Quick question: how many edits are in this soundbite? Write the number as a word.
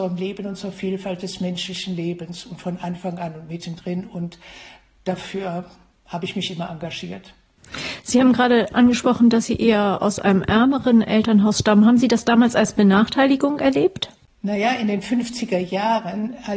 zero